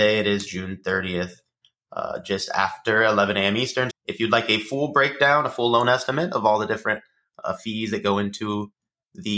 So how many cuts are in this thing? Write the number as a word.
one